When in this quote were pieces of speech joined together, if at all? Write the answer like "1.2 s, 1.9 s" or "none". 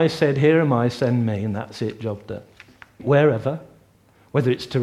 3.0 s